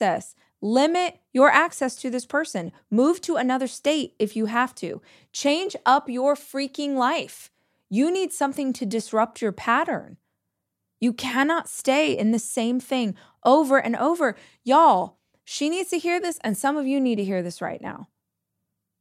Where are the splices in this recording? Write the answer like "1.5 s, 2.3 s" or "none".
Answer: none